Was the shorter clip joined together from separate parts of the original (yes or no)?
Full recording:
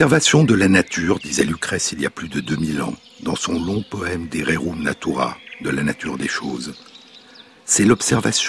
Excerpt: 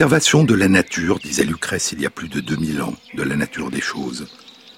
yes